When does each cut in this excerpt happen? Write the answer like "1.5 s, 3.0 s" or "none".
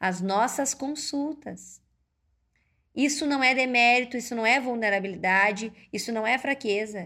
none